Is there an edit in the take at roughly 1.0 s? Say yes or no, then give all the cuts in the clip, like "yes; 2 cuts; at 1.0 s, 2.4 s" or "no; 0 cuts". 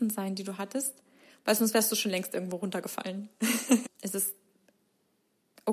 no; 1 cut; at 3.8 s